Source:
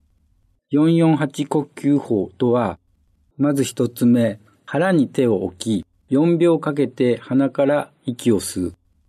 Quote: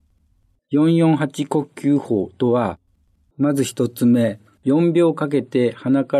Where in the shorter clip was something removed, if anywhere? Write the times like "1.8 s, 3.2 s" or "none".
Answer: 4.6 s